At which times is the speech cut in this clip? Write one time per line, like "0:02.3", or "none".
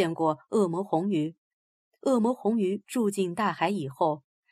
0:01.9

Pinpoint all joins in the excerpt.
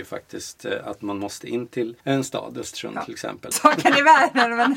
0:02.0
0:03.5

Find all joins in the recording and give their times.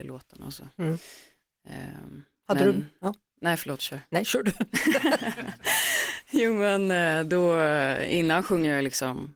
none

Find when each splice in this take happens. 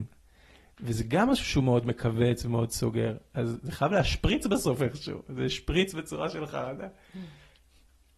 none

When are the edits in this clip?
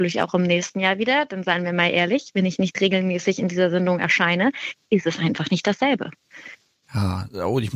0:06.8

